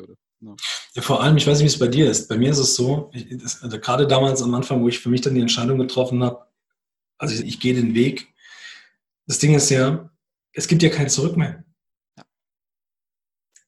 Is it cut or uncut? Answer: cut